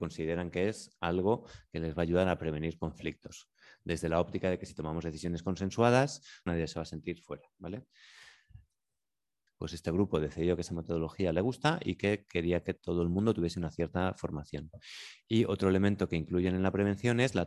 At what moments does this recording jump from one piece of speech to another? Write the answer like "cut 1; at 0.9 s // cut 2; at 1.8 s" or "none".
cut 1; at 6.5 s // cut 2; at 9.5 s